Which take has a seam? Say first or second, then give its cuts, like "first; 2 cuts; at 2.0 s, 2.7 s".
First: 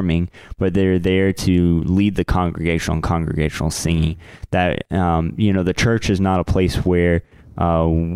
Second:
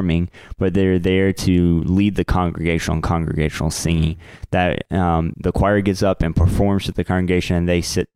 second; 1 cut; at 5.3 s